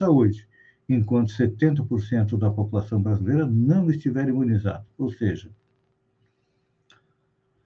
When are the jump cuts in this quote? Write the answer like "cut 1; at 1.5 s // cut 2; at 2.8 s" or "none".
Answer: none